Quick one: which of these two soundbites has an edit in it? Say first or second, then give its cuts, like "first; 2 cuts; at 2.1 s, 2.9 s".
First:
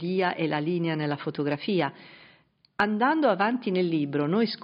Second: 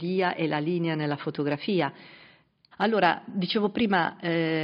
second; 1 cut; at 2.7 s